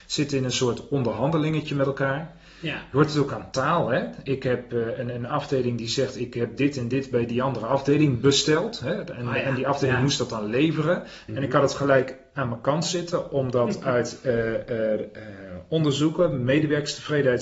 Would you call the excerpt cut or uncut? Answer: cut